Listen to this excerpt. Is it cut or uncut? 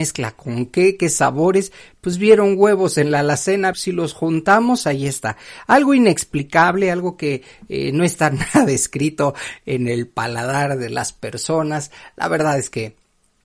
cut